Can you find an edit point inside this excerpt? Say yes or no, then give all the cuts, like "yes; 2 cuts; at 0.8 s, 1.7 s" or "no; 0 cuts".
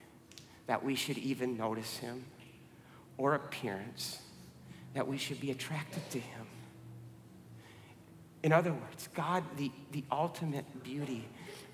no; 0 cuts